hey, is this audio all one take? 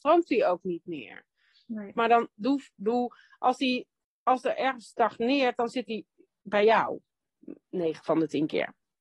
no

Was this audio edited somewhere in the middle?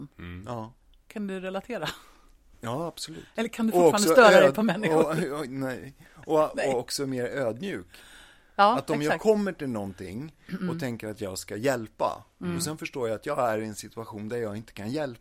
no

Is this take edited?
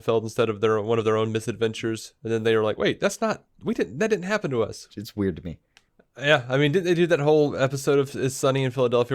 yes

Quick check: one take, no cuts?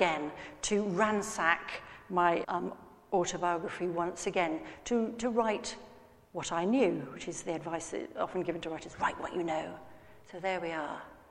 no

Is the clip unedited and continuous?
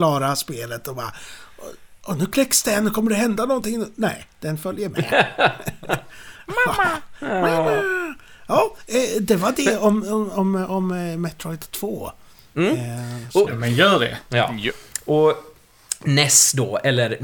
no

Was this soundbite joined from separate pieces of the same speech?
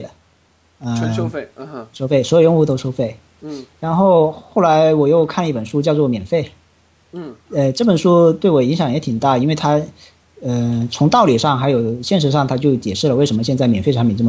no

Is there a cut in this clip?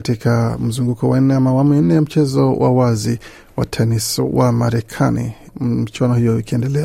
yes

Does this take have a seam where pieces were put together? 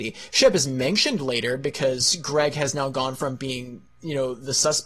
no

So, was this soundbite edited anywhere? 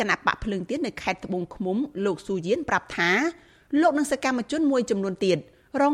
no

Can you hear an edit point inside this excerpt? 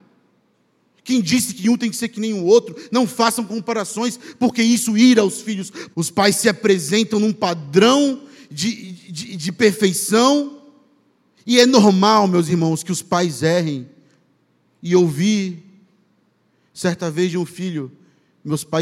yes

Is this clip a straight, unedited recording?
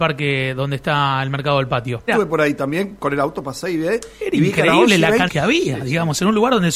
no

